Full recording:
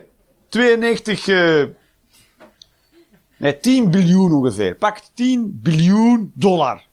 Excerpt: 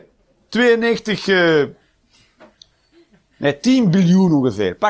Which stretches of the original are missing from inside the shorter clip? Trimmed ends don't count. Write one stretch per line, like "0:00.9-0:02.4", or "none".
none